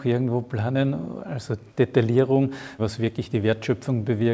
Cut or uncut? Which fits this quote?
cut